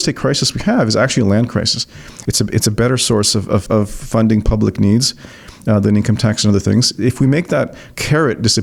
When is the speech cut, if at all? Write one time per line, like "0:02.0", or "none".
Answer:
0:02.3
0:03.7